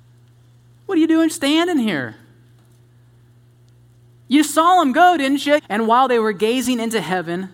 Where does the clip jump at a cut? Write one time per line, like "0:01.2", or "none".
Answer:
0:01.3
0:05.6